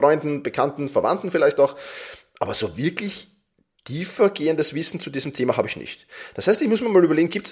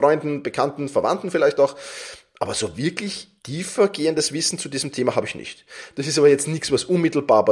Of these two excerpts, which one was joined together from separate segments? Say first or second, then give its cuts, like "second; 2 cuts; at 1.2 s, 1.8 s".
second; 2 cuts; at 3.4 s, 5.9 s